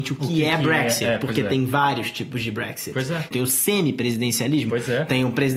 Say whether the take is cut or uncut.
cut